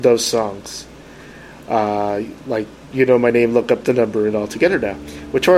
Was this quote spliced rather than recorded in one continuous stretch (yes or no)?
no